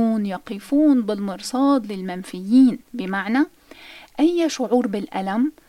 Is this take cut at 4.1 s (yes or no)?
no